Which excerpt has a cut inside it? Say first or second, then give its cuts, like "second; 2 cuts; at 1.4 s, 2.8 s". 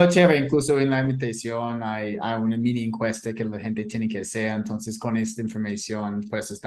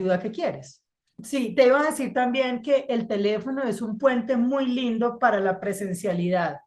second; 1 cut; at 1.1 s